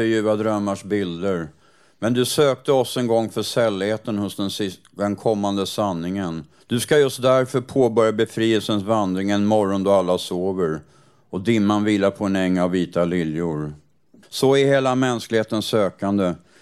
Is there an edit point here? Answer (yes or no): yes